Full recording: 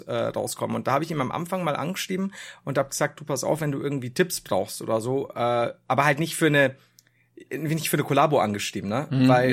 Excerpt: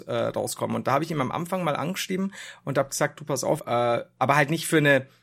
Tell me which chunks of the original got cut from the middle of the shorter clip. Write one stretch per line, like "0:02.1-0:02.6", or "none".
0:03.6-0:05.3